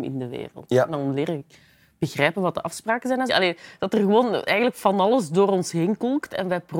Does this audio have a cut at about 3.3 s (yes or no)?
yes